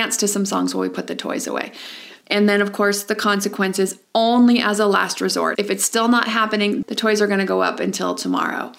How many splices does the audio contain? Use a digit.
3